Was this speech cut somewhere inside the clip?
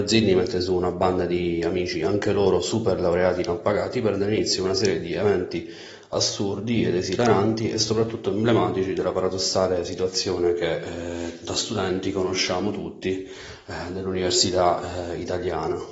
no; 0 cuts

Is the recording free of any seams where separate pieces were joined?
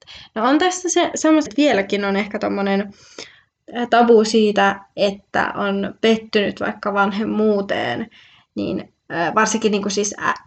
no; 1 cut; at 1.5 s

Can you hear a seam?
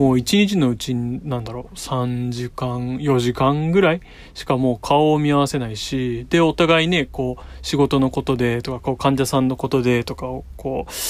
no; 0 cuts

